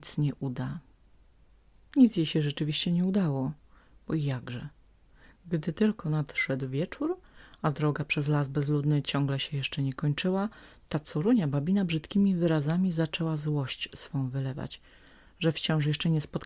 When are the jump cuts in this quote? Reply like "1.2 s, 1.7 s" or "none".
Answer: 1.8 s